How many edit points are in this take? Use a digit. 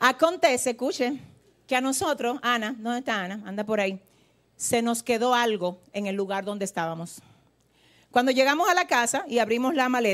0